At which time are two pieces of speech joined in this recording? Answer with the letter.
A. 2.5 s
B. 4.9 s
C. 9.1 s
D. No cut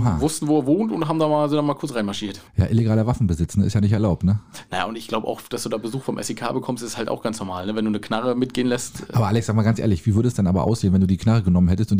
A